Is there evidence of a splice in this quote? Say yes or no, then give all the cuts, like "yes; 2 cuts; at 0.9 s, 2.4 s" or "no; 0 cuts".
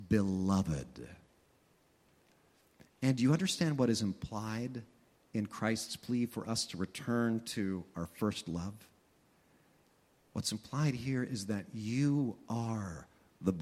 no; 0 cuts